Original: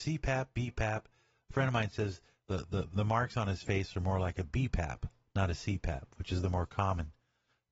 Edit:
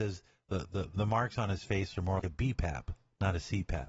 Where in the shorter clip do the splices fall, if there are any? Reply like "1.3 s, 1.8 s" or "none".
2.2 s